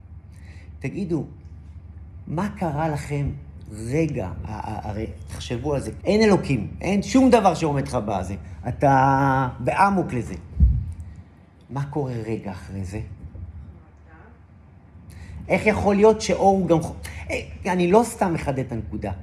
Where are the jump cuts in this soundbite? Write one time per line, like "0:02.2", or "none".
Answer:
0:06.0
0:15.4
0:17.6